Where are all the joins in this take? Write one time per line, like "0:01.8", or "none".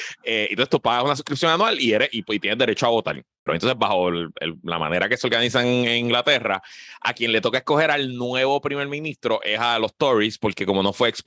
0:03.5